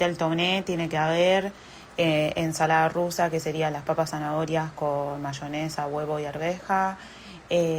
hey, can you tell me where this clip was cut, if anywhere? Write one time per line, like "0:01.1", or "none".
none